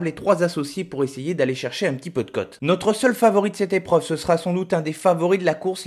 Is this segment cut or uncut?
uncut